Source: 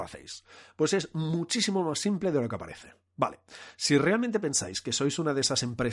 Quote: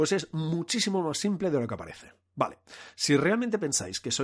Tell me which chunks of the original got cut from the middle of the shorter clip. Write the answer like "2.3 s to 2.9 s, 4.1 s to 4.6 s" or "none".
none